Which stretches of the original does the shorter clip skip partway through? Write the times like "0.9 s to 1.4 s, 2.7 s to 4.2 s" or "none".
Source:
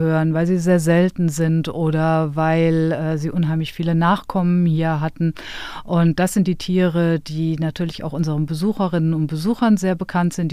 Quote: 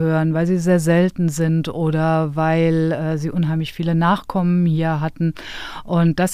none

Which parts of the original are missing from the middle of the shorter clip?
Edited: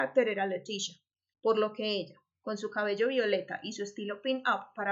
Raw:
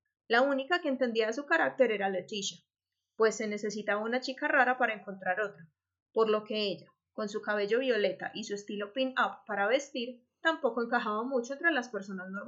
3.0 s to 6.0 s

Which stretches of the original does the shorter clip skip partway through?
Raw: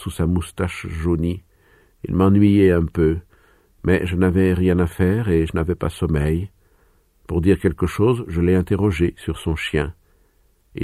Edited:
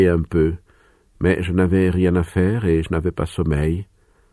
none

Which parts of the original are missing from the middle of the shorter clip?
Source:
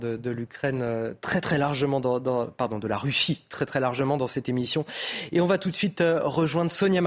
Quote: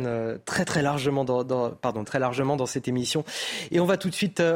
2.8 s to 3.7 s

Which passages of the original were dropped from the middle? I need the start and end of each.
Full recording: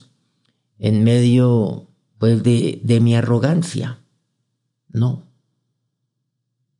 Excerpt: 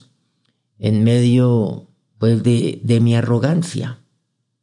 none

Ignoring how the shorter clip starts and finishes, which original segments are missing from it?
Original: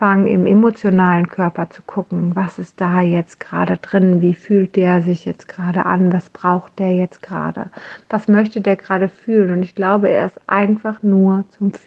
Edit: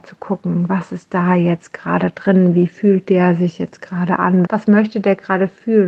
6.1 s to 8.1 s

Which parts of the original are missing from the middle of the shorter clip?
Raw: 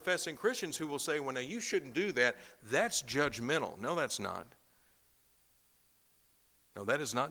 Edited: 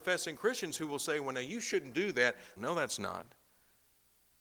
2.6 s to 3.8 s

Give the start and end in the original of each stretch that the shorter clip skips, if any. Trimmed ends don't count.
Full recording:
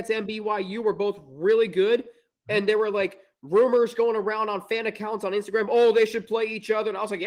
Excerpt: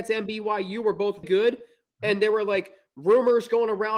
1.2 s to 1.7 s

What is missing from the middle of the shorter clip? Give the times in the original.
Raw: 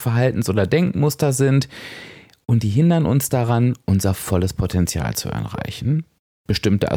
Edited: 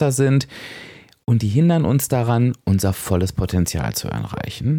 none

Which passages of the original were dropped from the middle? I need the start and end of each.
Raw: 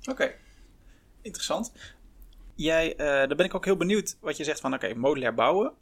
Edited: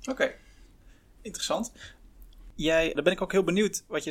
2.9 s to 3.3 s

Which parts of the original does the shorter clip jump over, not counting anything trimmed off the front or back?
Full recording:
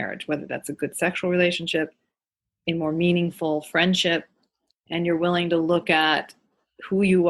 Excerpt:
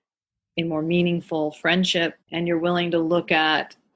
4.3 s to 4.8 s

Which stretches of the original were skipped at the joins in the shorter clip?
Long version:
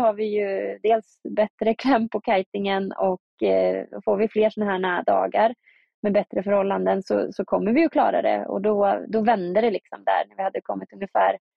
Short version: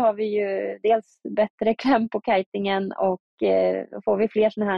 none

